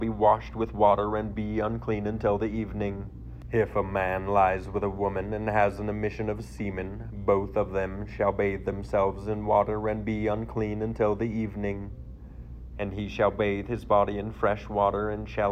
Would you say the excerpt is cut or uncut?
cut